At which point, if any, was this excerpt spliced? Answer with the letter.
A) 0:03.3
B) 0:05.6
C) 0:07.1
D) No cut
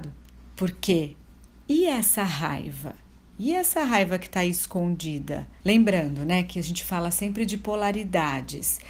B